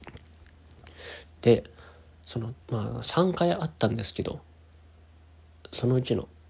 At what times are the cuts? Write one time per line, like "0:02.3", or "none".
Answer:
0:01.2
0:02.6